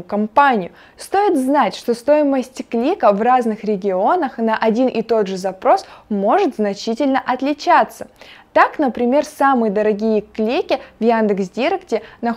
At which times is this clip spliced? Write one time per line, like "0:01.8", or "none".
none